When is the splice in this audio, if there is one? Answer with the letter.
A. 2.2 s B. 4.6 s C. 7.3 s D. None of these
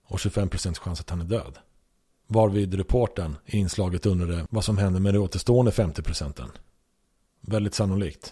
C